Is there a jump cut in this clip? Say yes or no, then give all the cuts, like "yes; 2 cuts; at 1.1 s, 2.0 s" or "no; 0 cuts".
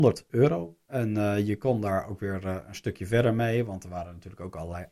no; 0 cuts